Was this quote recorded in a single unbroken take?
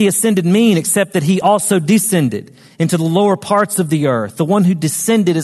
yes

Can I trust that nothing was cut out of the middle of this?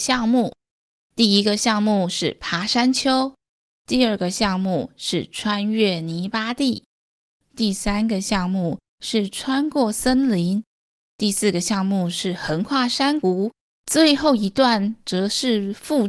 yes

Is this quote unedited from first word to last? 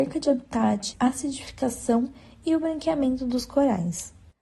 no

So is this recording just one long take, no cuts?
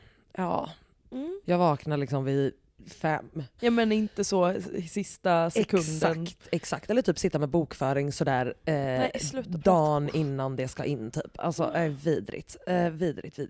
no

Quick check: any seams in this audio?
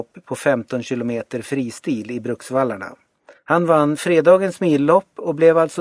yes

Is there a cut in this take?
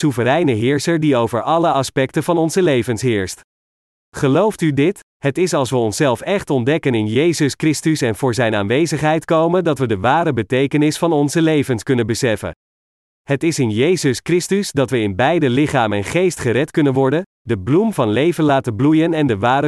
yes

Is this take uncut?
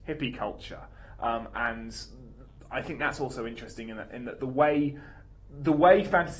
yes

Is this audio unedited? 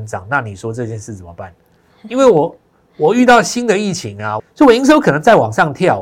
no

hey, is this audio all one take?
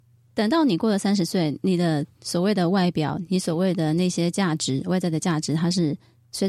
yes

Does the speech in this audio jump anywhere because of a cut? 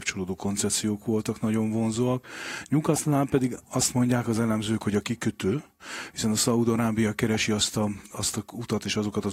no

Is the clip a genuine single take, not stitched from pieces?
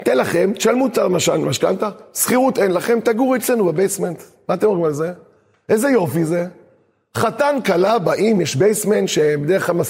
yes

